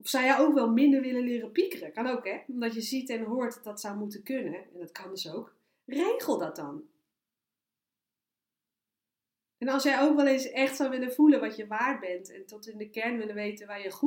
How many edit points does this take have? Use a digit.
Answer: 0